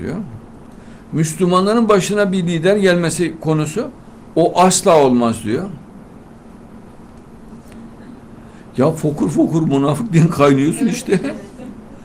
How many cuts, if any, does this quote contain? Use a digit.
1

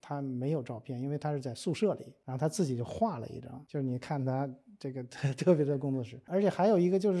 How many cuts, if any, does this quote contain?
0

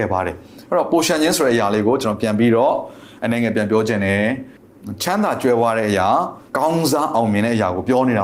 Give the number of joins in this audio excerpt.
1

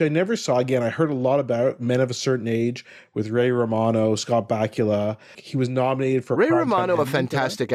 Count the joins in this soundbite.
1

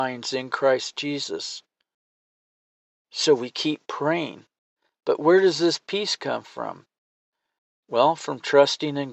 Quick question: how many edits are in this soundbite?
0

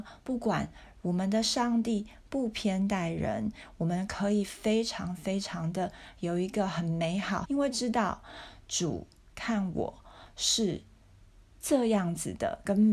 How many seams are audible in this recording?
2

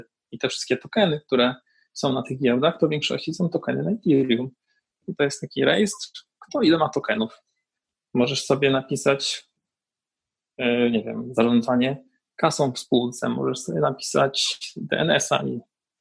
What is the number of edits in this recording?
0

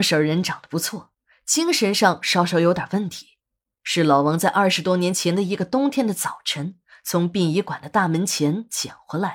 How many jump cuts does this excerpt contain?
0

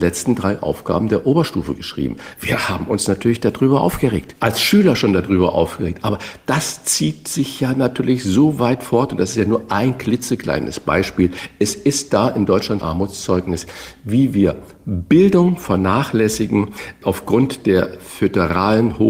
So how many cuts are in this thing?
1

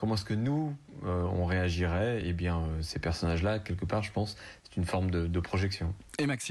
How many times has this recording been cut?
0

